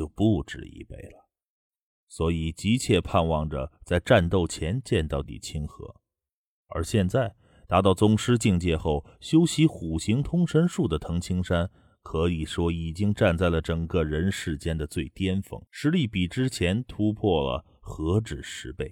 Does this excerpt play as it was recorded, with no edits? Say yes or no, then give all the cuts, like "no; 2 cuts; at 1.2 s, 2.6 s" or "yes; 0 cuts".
no; 3 cuts; at 1.9 s, 5.2 s, 15.7 s